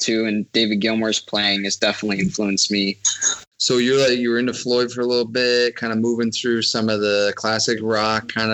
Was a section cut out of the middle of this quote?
yes; 1 cut; at 3.5 s

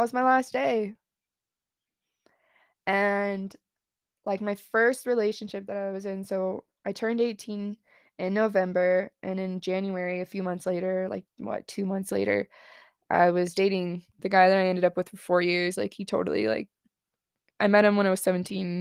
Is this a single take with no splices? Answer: yes; 0 cuts

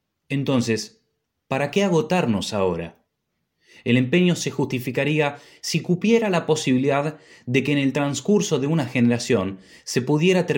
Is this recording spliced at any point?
no; 0 cuts

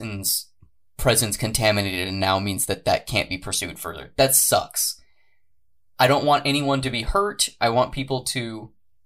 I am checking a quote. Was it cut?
no; 0 cuts

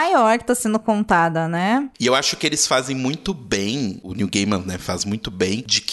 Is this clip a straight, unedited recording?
yes; 0 cuts

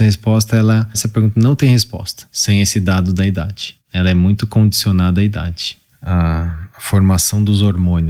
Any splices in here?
yes; 2 cuts; at 0.9 s, 5.9 s

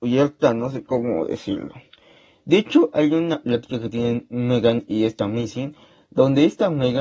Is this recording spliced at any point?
no; 0 cuts

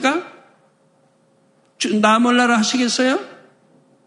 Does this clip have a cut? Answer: no; 0 cuts

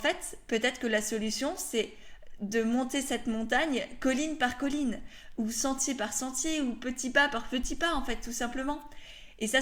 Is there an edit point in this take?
no; 0 cuts

